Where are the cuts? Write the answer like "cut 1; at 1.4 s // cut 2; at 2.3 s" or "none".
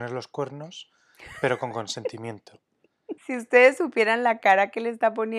cut 1; at 3.2 s